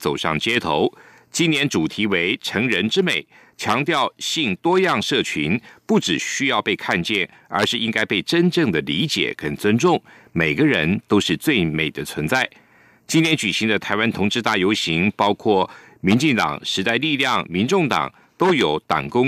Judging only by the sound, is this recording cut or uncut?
uncut